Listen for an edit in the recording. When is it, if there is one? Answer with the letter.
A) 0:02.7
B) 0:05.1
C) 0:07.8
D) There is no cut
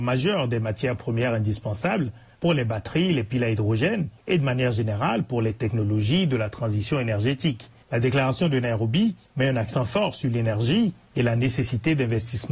C